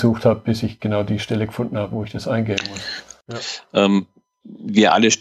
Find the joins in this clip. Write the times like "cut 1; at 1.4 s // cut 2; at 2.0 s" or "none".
cut 1; at 3.2 s